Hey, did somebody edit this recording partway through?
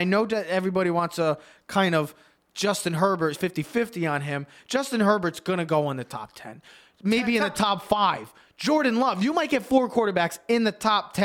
yes; 1 cut; at 3.4 s

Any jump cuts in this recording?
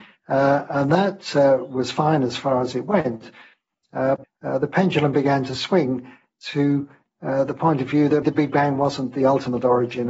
yes; 2 cuts; at 4.2 s, 8.2 s

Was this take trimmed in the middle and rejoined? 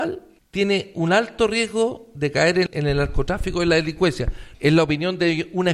yes; 1 cut; at 4.5 s

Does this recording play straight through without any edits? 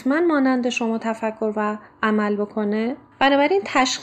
yes; 0 cuts

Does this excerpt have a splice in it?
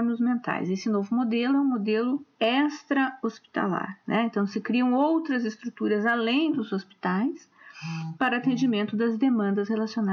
no; 0 cuts

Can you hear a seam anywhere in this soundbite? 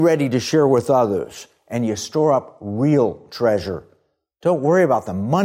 no; 0 cuts

